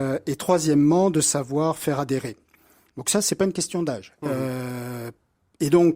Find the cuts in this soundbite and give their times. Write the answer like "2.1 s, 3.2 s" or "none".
4.1 s